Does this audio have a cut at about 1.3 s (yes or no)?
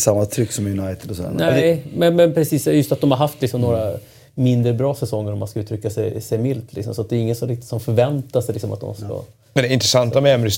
no